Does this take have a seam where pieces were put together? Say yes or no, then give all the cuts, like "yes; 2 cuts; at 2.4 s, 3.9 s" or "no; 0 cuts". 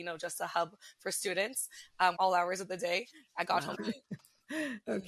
yes; 2 cuts; at 2.2 s, 3.7 s